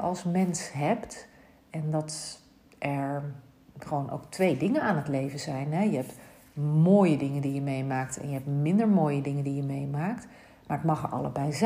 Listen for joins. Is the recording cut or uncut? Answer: uncut